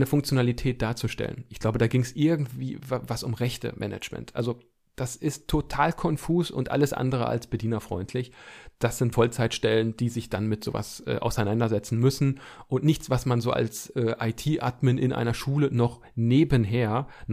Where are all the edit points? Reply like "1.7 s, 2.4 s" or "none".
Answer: 9.1 s